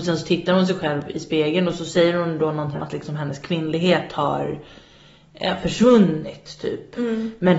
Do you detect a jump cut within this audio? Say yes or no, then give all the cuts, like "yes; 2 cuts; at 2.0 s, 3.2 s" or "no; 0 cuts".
yes; 1 cut; at 2.7 s